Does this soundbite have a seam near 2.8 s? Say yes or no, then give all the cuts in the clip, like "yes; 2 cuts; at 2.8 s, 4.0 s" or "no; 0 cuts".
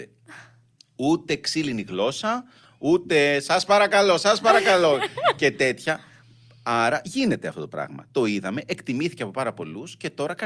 no; 0 cuts